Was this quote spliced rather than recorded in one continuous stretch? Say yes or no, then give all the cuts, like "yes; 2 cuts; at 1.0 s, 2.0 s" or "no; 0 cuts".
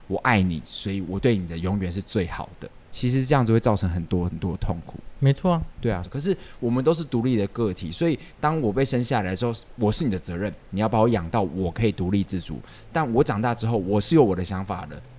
yes; 2 cuts; at 2.9 s, 6.0 s